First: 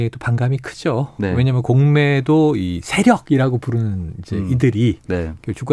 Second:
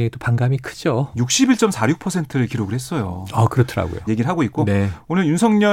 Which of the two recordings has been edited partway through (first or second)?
second